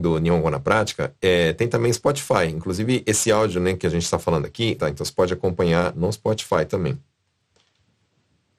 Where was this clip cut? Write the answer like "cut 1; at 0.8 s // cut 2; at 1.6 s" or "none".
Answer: cut 1; at 4.8 s